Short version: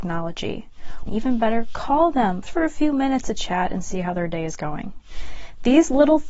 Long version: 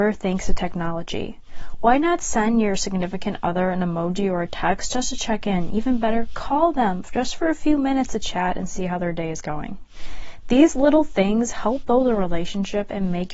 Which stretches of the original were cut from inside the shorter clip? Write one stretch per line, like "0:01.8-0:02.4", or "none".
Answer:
0:01.8-0:05.7
0:07.1-0:07.3